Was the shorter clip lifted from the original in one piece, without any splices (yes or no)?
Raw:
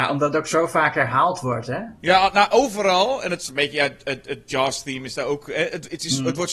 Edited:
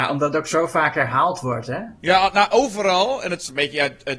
yes